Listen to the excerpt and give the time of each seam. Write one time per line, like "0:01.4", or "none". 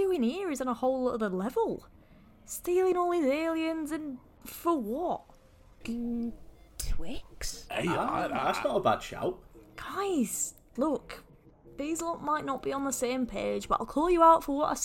0:05.8
0:10.8